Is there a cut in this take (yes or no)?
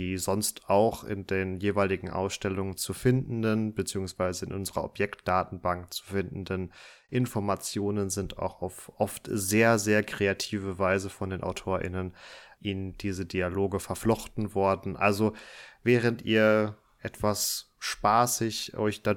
no